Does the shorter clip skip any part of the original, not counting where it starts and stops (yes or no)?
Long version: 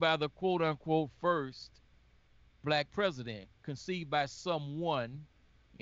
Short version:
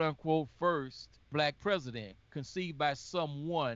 yes